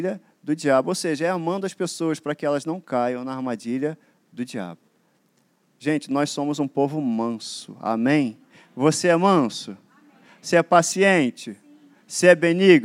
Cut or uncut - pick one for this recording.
uncut